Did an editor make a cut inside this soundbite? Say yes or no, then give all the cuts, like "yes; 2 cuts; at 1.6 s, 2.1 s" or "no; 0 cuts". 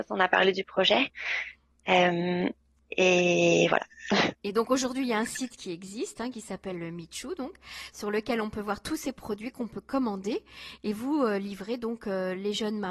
no; 0 cuts